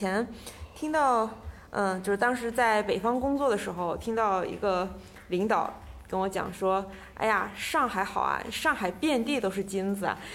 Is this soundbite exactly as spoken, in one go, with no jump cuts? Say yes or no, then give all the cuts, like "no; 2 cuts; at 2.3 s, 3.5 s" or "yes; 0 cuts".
yes; 0 cuts